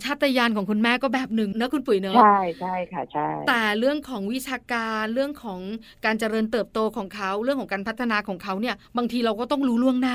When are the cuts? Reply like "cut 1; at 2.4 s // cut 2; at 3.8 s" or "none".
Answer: cut 1; at 8.9 s